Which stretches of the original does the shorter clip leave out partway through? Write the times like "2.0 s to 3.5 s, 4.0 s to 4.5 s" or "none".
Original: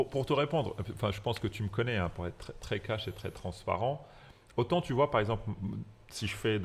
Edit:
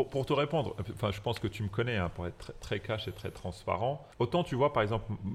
4.1 s to 4.5 s